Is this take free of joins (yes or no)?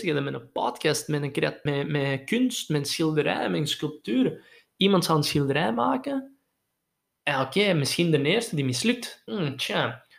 no